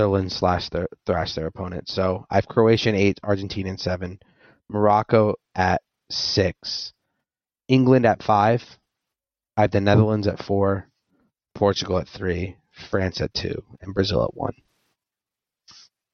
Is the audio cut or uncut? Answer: uncut